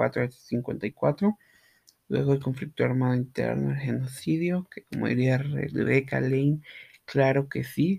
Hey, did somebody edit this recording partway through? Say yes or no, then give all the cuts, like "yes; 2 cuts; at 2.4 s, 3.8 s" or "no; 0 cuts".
no; 0 cuts